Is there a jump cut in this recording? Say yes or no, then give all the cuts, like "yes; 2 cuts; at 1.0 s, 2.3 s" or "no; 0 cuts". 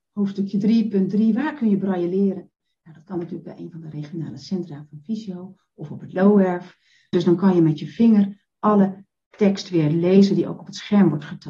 yes; 1 cut; at 7.1 s